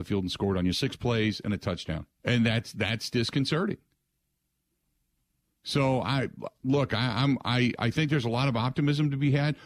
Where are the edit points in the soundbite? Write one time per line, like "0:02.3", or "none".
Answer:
0:02.1